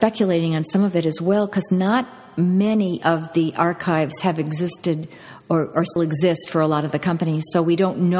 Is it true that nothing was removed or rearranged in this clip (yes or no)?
no